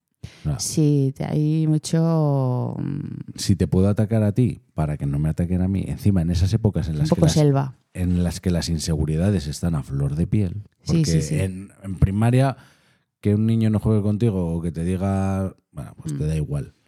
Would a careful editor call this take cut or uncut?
cut